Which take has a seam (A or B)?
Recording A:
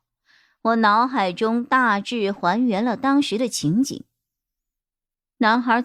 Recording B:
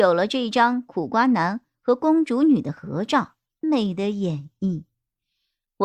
B